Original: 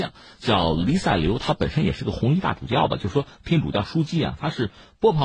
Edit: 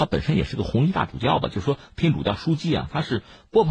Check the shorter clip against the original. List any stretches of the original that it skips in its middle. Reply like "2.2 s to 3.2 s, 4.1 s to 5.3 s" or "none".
none